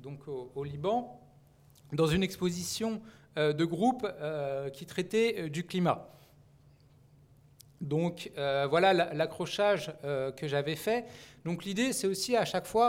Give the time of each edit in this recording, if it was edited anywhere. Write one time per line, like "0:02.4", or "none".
none